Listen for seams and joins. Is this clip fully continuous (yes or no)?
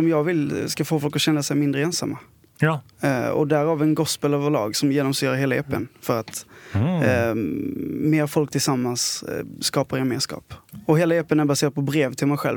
yes